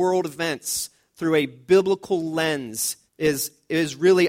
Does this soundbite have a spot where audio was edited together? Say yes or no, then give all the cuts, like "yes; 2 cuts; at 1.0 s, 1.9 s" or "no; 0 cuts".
yes; 1 cut; at 3.1 s